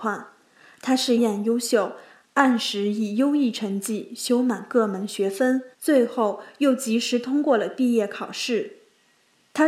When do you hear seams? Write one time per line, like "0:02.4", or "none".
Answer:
0:01.2
0:05.7